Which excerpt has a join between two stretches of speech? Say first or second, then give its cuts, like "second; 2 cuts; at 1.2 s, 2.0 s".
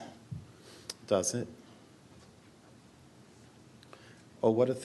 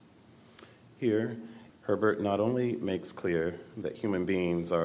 second; 1 cut; at 1.7 s